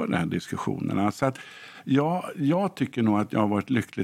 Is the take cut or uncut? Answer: uncut